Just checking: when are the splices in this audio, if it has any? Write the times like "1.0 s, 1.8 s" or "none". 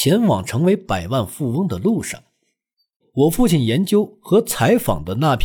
3.0 s